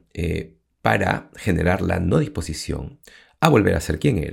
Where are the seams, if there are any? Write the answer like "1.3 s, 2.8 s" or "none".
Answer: none